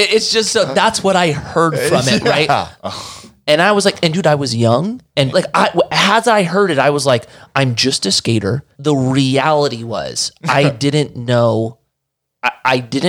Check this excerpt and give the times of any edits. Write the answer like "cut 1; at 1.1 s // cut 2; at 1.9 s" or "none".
cut 1; at 2.8 s // cut 2; at 5.3 s // cut 3; at 8.7 s